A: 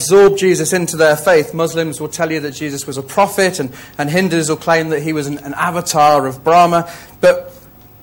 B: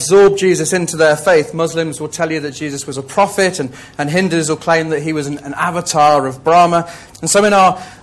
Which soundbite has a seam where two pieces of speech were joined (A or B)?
B